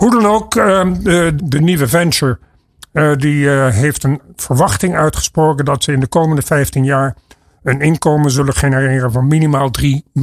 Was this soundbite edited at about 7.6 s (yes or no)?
no